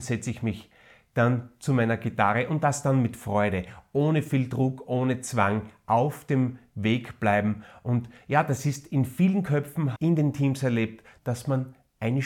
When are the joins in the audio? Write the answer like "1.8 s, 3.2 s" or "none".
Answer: 10.0 s, 11.2 s